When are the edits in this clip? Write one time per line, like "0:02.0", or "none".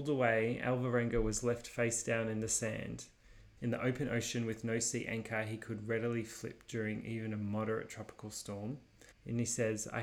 0:03.6
0:09.1